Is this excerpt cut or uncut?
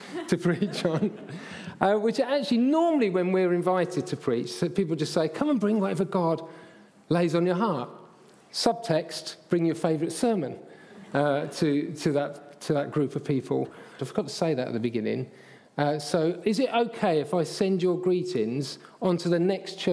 cut